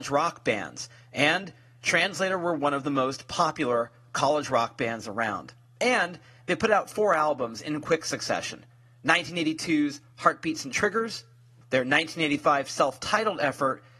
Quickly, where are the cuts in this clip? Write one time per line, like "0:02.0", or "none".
0:11.6